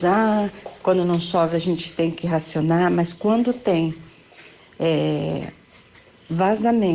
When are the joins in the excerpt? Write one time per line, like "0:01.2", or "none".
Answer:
none